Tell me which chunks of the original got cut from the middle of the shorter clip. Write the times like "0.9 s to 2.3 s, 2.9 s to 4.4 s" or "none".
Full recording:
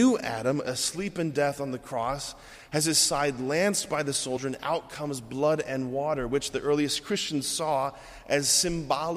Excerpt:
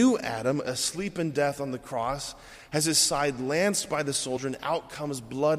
none